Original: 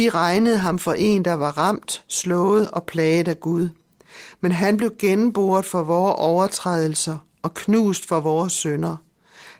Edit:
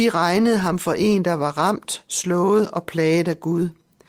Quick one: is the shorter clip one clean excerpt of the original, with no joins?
yes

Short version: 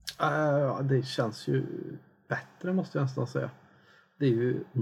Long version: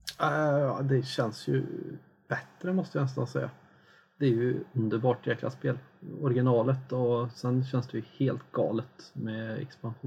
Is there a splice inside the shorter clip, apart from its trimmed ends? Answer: no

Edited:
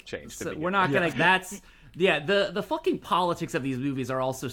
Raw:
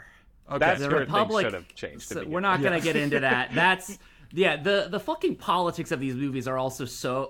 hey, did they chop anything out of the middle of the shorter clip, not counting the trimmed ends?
yes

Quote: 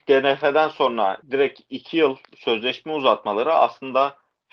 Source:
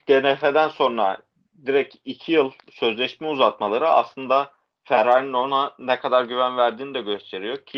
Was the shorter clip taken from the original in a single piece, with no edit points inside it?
no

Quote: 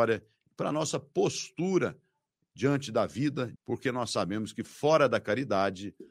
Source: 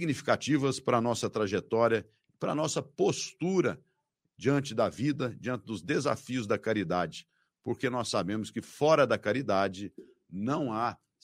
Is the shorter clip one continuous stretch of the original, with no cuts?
no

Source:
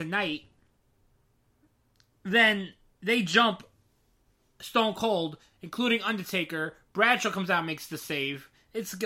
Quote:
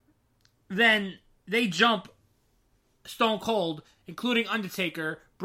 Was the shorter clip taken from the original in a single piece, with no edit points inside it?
yes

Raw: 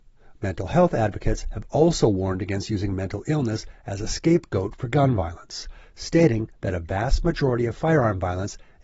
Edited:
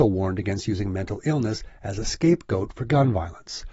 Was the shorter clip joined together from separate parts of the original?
no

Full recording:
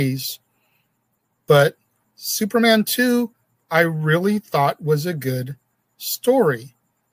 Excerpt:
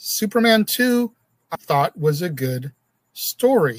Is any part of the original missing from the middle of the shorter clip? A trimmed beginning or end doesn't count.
yes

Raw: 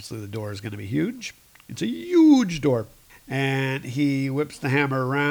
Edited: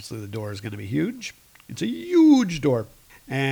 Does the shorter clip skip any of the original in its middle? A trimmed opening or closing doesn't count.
no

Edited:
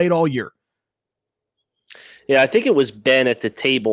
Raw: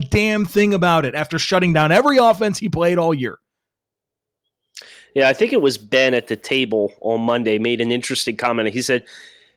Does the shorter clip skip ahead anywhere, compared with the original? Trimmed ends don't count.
no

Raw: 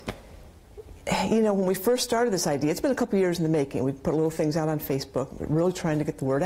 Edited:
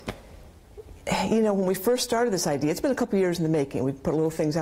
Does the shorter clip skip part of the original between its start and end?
no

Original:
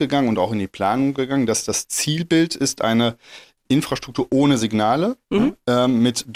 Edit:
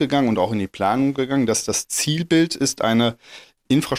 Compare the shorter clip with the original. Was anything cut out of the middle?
no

